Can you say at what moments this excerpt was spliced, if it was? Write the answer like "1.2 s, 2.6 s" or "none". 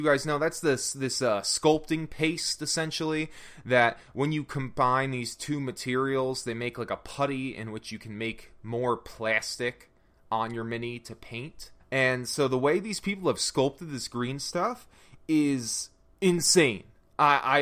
11.8 s

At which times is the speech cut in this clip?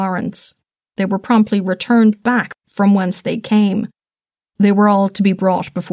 0.9 s

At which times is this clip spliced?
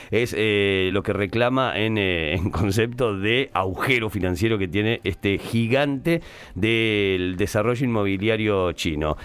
0.9 s

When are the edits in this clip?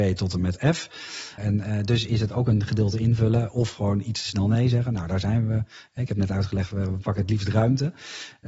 1.4 s

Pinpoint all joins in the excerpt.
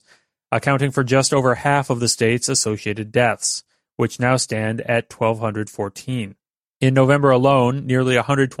none

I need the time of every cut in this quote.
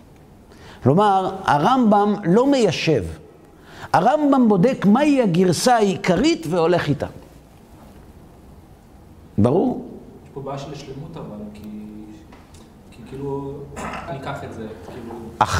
14.1 s

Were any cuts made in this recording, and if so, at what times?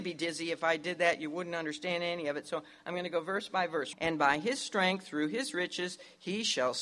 3.9 s

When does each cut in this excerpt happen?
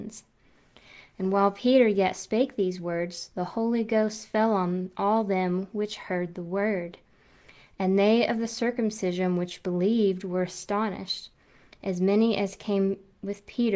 none

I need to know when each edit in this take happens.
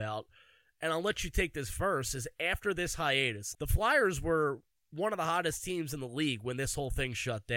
3.5 s

